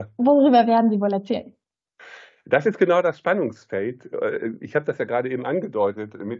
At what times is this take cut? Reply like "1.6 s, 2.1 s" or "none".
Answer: none

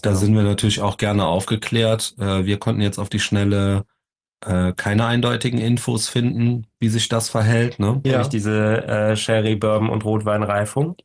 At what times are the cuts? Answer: 8.0 s

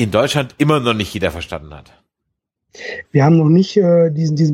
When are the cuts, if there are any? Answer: 3.0 s

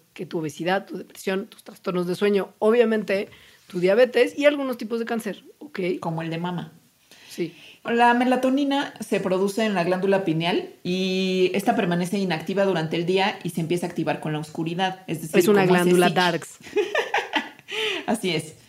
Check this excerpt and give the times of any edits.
7.9 s

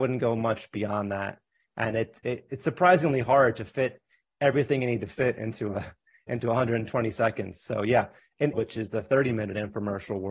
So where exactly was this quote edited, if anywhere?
8.5 s

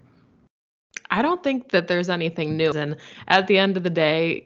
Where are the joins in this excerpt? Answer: 2.7 s

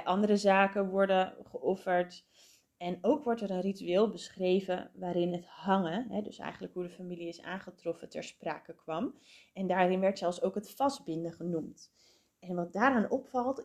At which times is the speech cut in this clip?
none

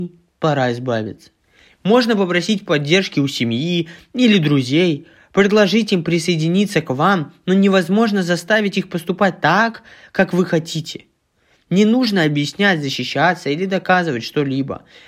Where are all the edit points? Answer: none

